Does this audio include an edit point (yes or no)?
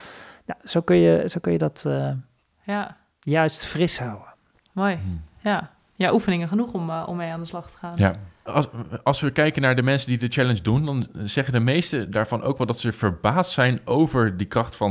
yes